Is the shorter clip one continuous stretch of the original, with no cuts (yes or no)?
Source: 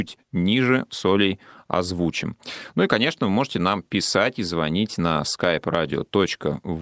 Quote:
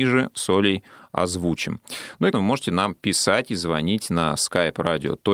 no